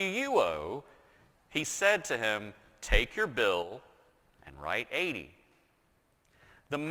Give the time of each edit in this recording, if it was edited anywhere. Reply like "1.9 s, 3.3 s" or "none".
1.4 s

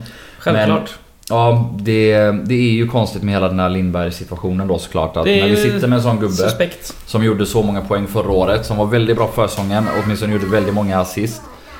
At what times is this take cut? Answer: none

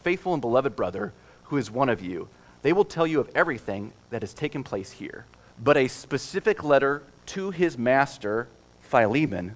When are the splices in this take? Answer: 5.5 s

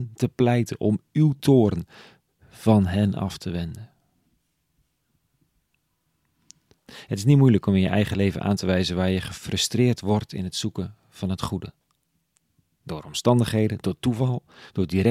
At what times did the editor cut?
6.8 s, 13.8 s

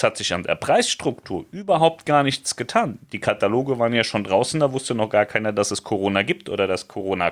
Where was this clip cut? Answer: none

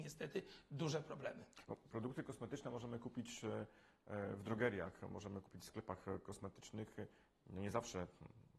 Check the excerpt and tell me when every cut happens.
none

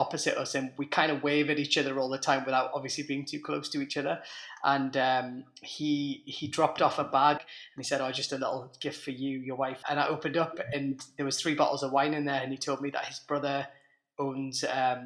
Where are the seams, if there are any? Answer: 7.4 s, 9.8 s

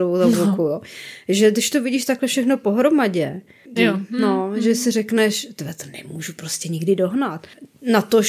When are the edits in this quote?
3.8 s

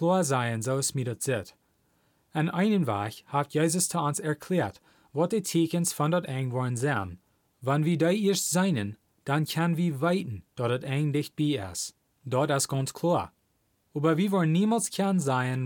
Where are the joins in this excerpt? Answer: none

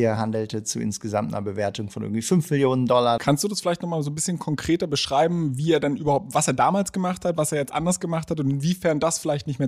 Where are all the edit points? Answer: 3.2 s

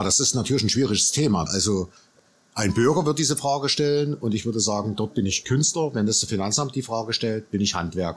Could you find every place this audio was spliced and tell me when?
1.5 s

